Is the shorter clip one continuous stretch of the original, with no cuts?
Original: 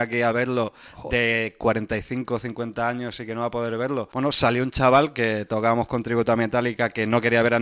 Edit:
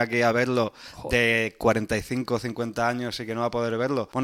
yes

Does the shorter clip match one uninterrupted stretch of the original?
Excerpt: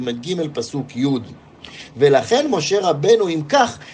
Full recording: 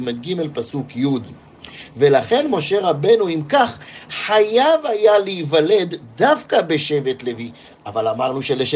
yes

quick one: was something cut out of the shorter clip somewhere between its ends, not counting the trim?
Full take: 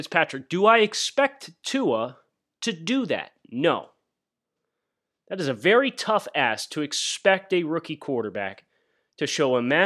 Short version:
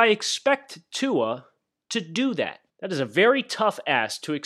yes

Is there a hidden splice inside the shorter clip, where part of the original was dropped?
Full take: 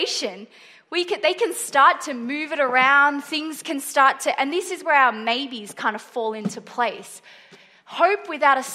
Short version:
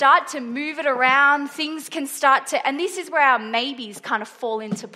no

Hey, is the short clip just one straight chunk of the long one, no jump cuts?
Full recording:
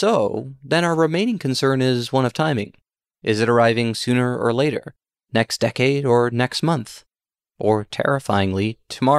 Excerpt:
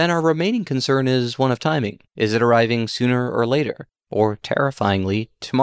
no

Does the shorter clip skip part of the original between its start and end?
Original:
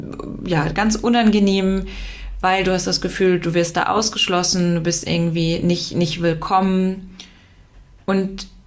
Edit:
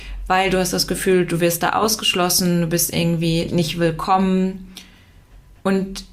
yes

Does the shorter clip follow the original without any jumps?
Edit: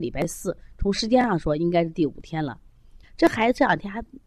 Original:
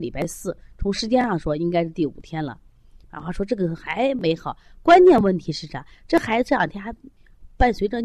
no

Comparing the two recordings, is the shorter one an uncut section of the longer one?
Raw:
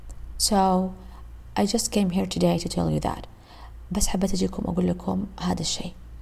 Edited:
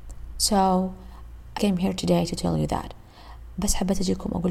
no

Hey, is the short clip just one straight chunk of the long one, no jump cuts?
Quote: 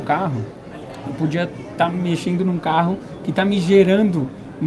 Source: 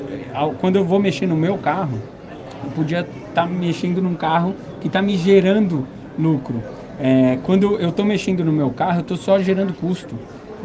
yes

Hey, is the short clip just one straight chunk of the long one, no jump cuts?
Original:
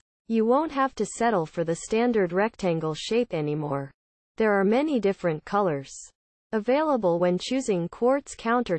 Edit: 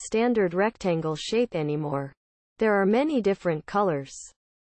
yes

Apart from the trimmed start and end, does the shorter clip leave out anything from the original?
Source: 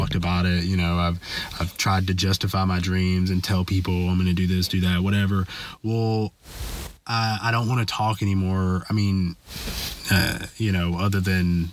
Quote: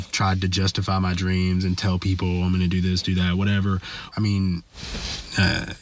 yes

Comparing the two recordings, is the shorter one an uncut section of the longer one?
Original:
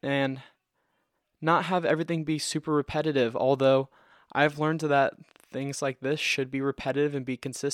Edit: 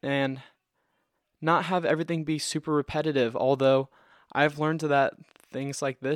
yes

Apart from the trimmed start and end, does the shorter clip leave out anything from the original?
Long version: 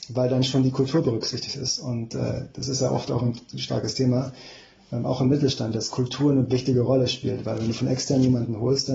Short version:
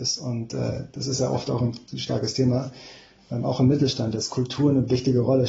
no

